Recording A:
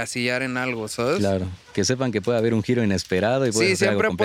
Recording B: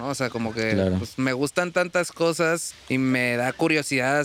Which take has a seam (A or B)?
B